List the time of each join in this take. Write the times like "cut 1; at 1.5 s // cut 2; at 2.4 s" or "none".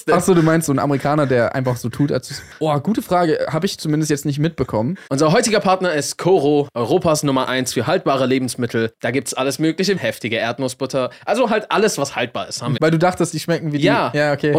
cut 1; at 5.1 s // cut 2; at 10.0 s // cut 3; at 12.8 s